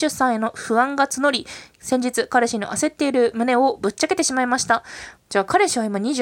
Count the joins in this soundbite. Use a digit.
1